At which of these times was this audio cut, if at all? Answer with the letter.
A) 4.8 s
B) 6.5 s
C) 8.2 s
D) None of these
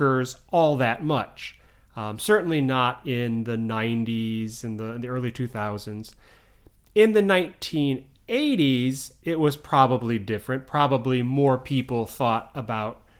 D